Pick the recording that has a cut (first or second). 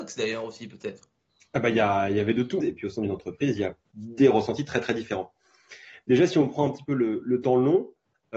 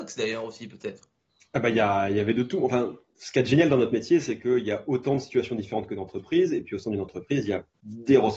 first